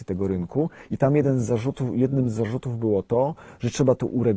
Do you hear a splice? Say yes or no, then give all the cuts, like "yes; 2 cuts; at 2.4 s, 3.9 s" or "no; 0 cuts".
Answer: no; 0 cuts